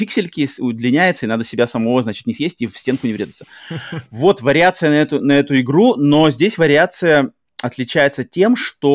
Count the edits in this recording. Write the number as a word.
zero